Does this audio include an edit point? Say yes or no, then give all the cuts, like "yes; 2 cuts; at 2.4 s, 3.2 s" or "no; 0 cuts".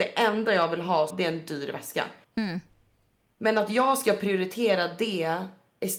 yes; 2 cuts; at 1.1 s, 2.2 s